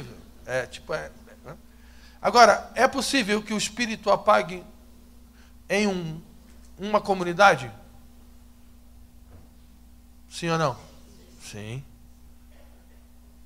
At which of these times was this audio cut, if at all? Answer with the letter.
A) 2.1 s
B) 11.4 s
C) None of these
C